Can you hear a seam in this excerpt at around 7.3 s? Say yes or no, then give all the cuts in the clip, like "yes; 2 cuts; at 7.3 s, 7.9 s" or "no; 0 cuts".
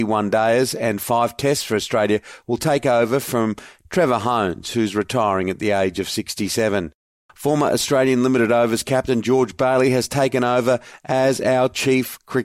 yes; 1 cut; at 7.3 s